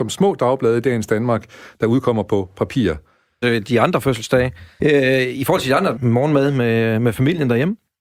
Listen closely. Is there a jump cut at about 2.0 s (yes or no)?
no